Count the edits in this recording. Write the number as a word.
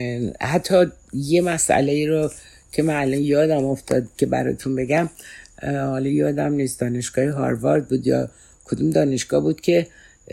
zero